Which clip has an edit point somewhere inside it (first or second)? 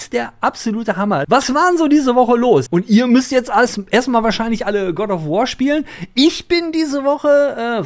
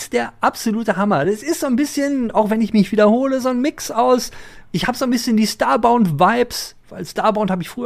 first